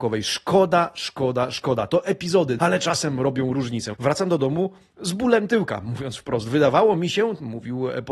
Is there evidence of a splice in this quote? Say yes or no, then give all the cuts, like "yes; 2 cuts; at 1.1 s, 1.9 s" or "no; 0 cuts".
yes; 2 cuts; at 2.6 s, 3.9 s